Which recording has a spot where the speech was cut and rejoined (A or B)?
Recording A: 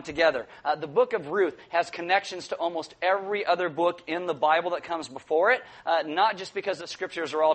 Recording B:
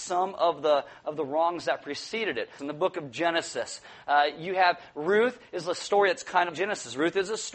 B